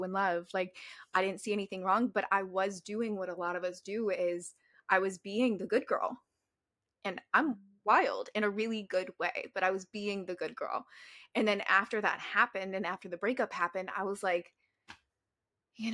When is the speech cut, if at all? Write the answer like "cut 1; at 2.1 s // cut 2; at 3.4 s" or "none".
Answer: none